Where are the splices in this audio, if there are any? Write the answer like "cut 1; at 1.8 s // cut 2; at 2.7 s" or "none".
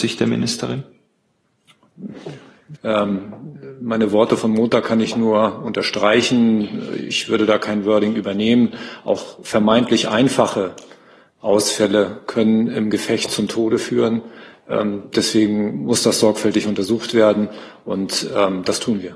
cut 1; at 2.8 s